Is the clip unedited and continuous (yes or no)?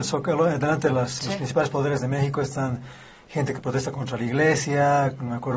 yes